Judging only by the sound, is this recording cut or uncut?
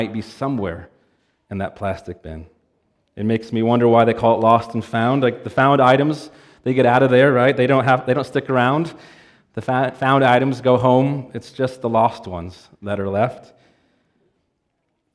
uncut